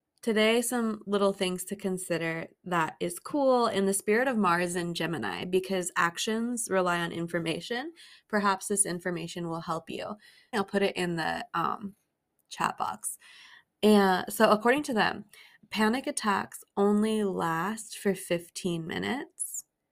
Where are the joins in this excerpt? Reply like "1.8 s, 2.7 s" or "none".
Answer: 10.5 s